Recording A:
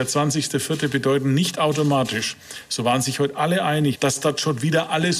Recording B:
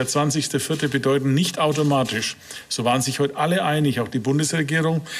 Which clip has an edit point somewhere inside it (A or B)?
A